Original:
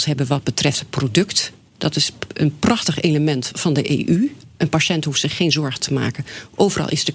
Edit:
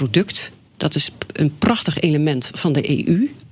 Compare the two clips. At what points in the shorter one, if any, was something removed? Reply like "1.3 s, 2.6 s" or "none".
none